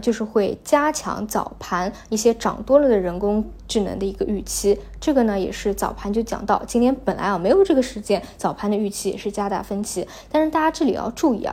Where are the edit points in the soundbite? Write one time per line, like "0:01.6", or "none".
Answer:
none